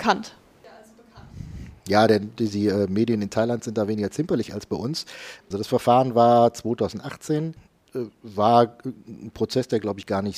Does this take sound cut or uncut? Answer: cut